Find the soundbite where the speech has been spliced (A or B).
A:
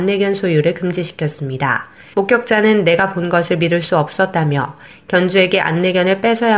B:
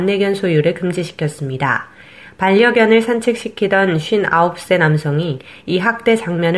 A